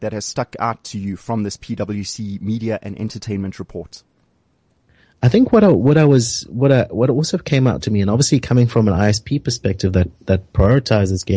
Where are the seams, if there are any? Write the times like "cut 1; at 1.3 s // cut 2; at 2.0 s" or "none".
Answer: none